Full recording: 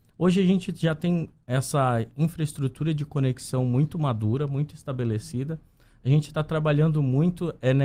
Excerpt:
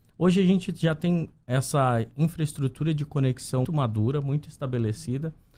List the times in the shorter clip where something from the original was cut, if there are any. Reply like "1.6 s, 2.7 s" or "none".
3.6 s